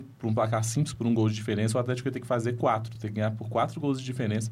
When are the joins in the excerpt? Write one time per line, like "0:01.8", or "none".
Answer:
none